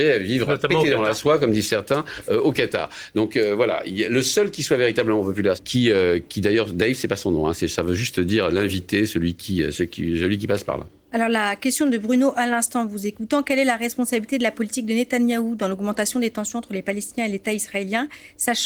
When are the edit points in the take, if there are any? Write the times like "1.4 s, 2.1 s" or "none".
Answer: 5.6 s